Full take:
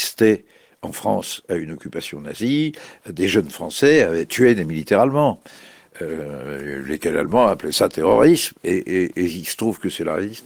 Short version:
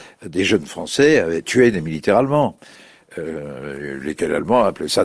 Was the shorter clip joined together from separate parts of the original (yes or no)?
no